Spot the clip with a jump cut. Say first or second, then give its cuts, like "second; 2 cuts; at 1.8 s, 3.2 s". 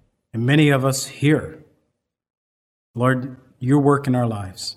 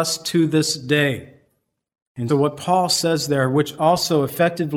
second; 1 cut; at 2.3 s